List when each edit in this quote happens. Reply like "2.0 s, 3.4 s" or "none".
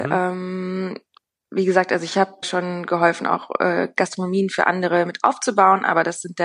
2.4 s